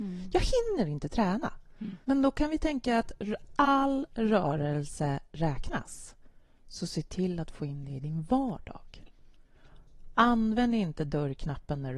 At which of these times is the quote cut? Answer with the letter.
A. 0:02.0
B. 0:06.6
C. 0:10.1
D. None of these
A